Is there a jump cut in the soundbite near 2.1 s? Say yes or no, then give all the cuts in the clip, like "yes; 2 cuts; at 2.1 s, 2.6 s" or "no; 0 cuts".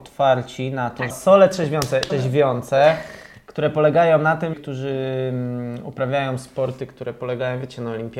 yes; 3 cuts; at 1.1 s, 2.1 s, 4.5 s